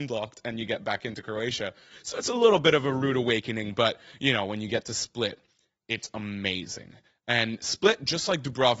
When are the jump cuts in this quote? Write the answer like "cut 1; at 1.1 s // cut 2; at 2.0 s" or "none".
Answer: none